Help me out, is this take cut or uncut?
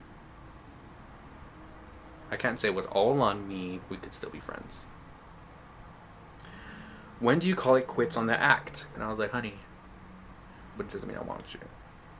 cut